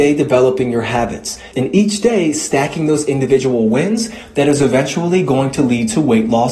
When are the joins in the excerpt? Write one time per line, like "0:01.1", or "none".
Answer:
0:01.5